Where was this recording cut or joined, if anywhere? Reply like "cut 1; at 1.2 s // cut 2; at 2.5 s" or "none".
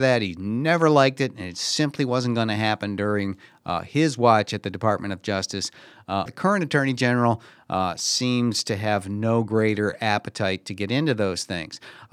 cut 1; at 6.3 s